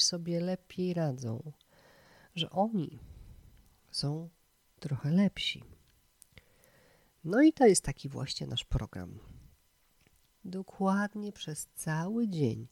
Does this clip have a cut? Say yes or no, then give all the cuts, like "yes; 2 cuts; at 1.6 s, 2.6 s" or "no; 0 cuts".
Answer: yes; 1 cut; at 10.3 s